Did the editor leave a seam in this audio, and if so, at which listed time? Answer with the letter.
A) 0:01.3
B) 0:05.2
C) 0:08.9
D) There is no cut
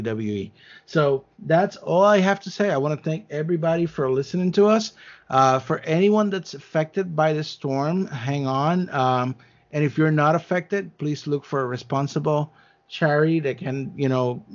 A